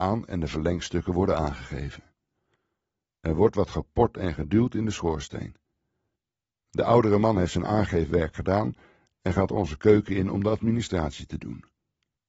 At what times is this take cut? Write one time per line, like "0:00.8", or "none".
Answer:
none